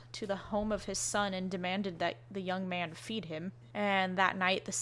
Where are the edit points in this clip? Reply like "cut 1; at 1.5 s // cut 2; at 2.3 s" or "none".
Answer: cut 1; at 3.7 s